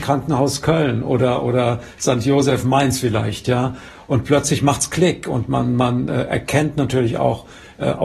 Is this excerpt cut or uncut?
uncut